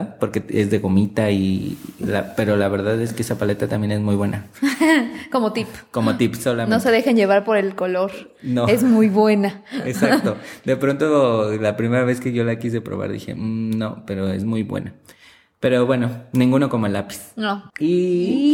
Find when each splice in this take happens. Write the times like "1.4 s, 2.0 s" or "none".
none